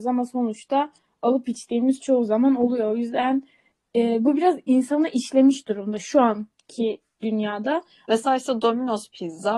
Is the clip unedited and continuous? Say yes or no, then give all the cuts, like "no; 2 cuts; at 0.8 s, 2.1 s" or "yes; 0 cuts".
no; 1 cut; at 8.0 s